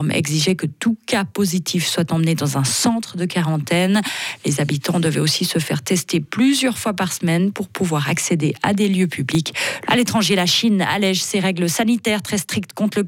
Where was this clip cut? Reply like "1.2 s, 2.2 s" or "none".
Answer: 9.9 s

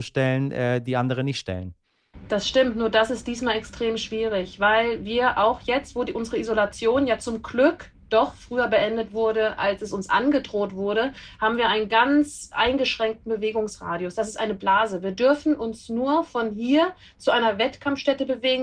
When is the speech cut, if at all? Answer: none

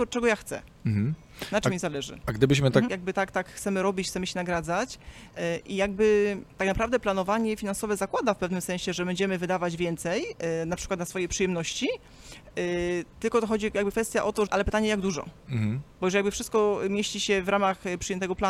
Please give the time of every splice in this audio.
2.9 s, 14.5 s, 15.9 s

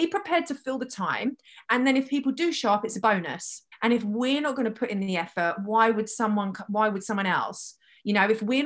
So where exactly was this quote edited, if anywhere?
3.7 s

